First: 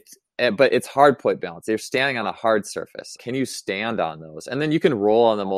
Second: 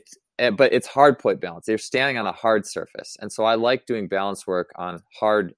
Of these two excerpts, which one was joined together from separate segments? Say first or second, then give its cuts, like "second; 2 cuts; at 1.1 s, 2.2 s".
first; 1 cut; at 3.2 s